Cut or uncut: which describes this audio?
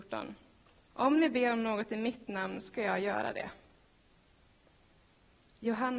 cut